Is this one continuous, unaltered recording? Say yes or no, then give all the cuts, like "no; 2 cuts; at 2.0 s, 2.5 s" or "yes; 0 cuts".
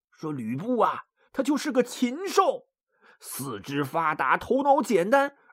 yes; 0 cuts